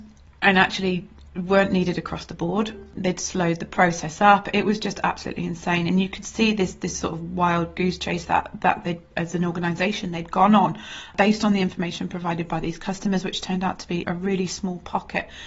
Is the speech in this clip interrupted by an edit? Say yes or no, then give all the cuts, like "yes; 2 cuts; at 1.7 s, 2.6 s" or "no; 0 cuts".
yes; 1 cut; at 14.0 s